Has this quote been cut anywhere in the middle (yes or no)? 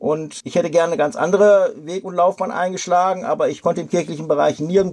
no